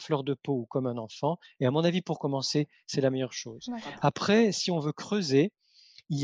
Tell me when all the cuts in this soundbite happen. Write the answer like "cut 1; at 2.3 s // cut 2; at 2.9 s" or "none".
none